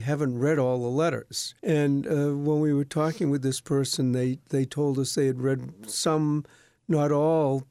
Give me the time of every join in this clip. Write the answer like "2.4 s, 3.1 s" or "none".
1.6 s

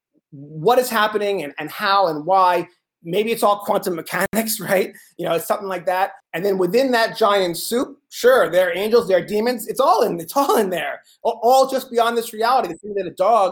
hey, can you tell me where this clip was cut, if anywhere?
6.2 s

